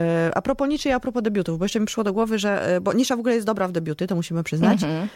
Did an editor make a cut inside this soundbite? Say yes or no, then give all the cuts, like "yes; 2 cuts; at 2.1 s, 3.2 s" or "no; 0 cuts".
no; 0 cuts